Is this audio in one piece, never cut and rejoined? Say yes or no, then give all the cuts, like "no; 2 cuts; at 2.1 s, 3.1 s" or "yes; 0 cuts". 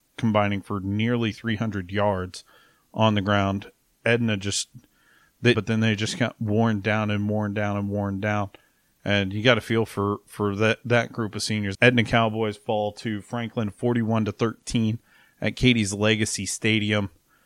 no; 2 cuts; at 5.5 s, 11.7 s